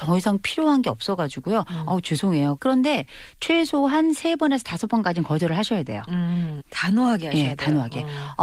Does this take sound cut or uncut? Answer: cut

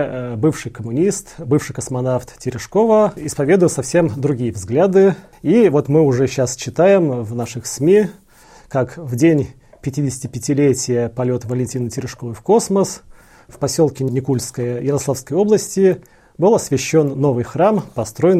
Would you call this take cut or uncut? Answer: uncut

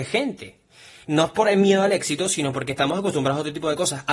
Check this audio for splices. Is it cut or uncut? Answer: cut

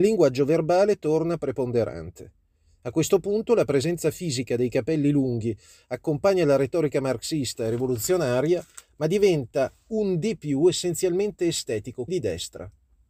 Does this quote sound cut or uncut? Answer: cut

